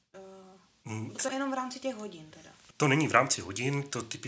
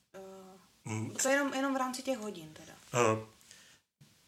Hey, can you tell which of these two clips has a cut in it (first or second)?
first